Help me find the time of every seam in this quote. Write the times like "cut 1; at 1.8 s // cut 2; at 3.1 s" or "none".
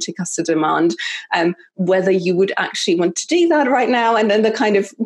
none